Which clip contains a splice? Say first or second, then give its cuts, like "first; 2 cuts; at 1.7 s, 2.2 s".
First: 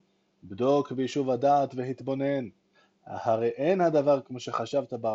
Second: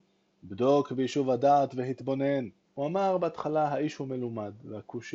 second; 1 cut; at 2.7 s